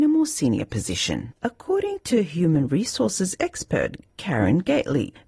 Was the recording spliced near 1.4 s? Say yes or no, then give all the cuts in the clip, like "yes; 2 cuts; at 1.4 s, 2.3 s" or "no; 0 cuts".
yes; 1 cut; at 1.4 s